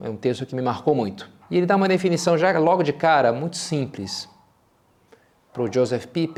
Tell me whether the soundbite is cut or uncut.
cut